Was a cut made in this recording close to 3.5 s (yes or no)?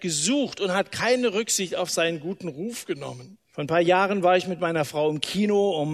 yes